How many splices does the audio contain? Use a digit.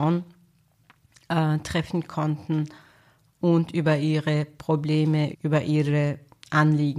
1